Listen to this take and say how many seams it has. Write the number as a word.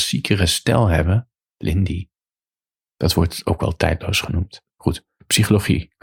zero